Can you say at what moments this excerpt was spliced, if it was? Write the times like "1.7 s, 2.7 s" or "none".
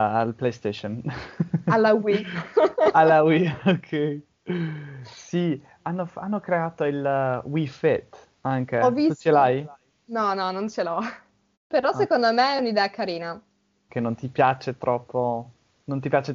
8.3 s, 11.5 s, 13.9 s